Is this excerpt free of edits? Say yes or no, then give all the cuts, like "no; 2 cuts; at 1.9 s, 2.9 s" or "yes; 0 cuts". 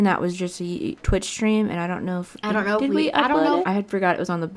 no; 2 cuts; at 1.0 s, 3.6 s